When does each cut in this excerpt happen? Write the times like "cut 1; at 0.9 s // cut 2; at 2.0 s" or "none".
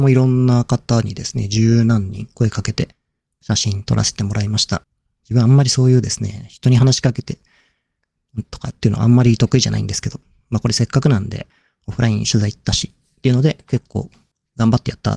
none